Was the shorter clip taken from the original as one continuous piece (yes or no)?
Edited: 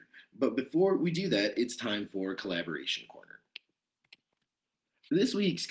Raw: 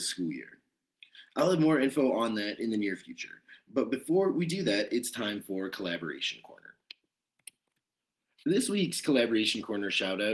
yes